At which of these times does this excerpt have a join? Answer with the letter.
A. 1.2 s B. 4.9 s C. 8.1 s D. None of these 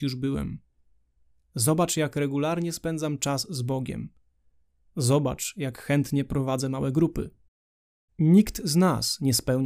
C